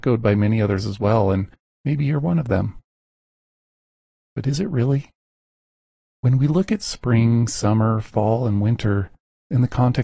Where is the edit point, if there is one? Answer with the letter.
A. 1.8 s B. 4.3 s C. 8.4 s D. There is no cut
B